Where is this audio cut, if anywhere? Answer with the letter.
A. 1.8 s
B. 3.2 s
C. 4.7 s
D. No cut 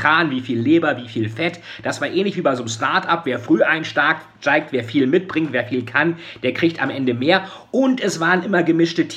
D